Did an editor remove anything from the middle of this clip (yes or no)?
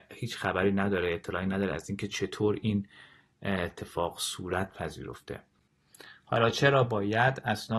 no